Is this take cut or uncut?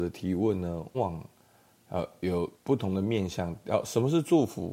cut